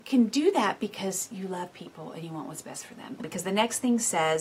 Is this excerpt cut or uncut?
cut